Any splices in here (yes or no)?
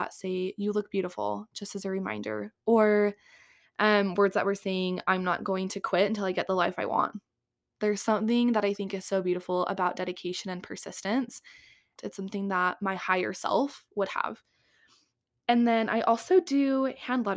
yes